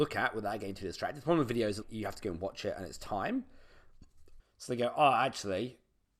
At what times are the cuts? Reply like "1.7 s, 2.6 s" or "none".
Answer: 1.8 s, 4.4 s